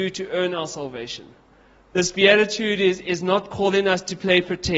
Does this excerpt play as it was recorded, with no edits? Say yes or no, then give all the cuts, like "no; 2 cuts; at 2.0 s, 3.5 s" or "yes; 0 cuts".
no; 1 cut; at 1.8 s